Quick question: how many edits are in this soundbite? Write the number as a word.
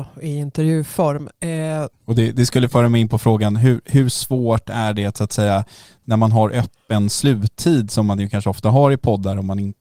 one